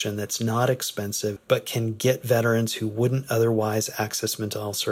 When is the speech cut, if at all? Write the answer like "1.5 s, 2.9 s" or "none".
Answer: 1.4 s